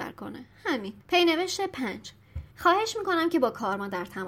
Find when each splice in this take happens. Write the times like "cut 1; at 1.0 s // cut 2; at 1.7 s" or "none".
cut 1; at 1.0 s // cut 2; at 2.5 s